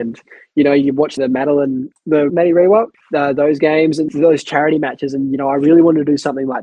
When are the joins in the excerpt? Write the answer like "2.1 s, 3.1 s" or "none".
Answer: none